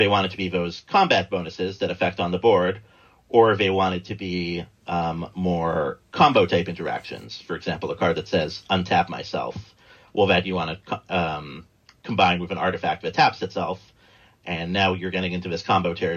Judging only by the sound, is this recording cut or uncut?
uncut